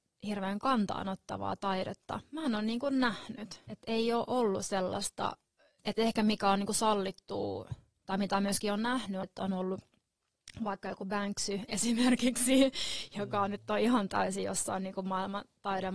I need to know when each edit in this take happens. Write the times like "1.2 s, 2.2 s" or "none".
3.7 s, 5.8 s, 9.2 s

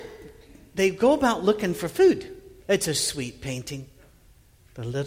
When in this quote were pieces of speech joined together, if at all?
2.6 s

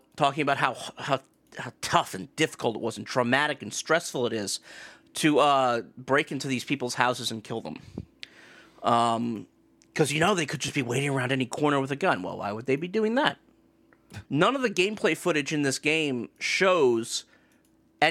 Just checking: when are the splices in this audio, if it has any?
14.3 s

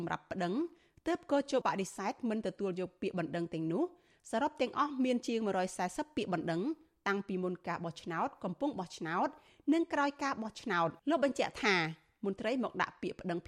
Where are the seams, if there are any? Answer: 1.6 s, 11.0 s

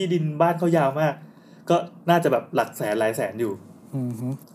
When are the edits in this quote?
none

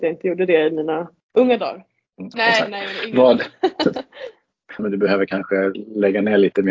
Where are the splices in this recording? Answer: 2.3 s, 4.8 s

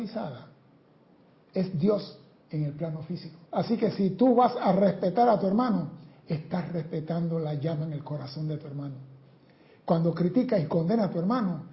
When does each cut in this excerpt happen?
3.5 s

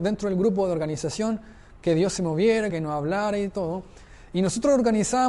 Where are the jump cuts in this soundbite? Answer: 2.7 s

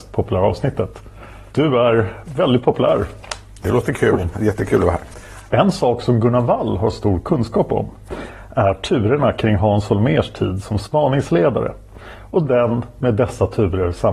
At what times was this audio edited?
1.5 s, 4.3 s, 5.5 s

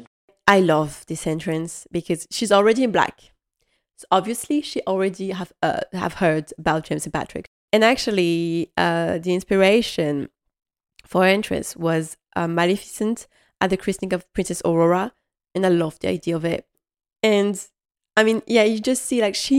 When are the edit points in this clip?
none

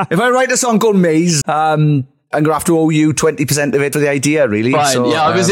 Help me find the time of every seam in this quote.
1.4 s, 3.9 s

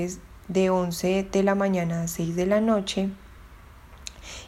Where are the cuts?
none

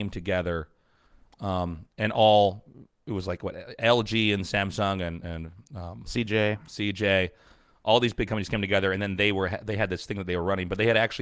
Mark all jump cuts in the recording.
none

